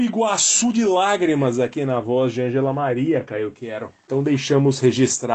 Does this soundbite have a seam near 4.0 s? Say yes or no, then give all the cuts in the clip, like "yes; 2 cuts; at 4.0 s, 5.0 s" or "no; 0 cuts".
no; 0 cuts